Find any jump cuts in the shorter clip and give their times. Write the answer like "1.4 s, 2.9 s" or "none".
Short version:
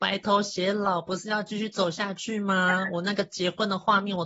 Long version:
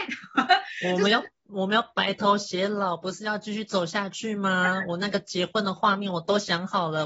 none